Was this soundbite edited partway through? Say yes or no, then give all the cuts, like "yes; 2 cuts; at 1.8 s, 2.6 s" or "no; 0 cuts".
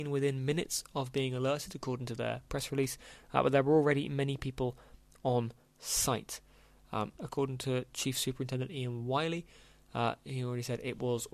yes; 1 cut; at 7.2 s